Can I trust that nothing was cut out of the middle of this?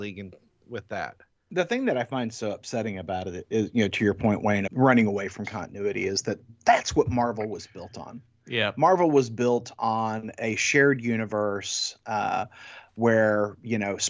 no; 1 cut; at 4.7 s

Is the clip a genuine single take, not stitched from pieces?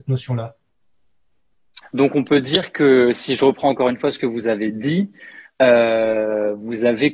no; 1 cut; at 1.8 s

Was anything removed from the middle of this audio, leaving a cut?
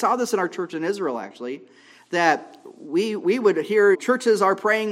yes; 1 cut; at 3.9 s

